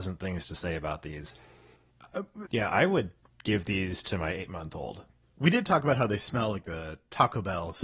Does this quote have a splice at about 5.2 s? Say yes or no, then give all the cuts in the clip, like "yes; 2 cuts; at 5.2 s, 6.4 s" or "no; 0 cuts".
yes; 2 cuts; at 2.4 s, 5.2 s